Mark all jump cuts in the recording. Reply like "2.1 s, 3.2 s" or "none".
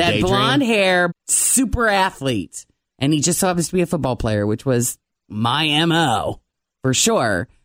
1.1 s